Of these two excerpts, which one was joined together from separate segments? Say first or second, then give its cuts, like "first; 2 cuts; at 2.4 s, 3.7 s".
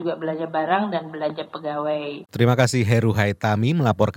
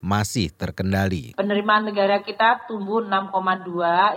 first; 1 cut; at 2.3 s